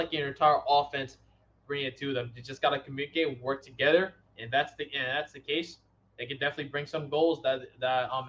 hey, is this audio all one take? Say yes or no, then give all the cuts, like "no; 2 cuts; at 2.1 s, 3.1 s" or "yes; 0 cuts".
yes; 0 cuts